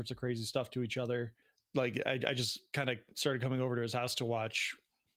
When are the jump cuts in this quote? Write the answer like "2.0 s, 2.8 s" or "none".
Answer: none